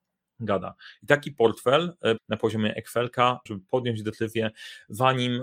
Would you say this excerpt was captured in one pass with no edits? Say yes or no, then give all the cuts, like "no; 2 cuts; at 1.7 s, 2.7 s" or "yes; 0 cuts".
no; 2 cuts; at 2.2 s, 3.5 s